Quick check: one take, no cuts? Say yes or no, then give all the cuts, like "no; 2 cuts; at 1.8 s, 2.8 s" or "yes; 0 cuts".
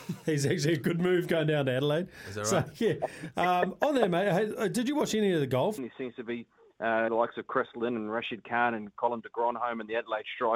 no; 2 cuts; at 5.8 s, 7.1 s